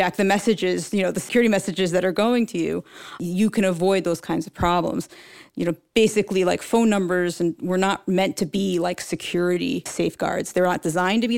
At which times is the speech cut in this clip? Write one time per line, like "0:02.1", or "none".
none